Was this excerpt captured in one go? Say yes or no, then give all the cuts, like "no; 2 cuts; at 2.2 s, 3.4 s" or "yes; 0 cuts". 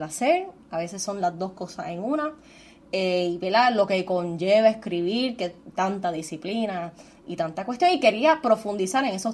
yes; 0 cuts